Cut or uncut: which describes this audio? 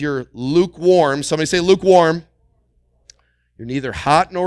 uncut